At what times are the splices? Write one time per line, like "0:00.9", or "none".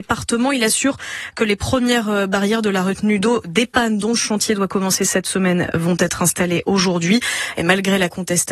none